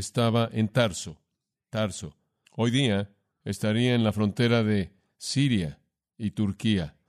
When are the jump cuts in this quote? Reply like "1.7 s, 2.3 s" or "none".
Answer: 2.5 s